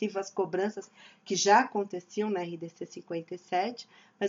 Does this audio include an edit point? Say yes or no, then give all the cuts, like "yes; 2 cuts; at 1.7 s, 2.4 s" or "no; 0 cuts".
no; 0 cuts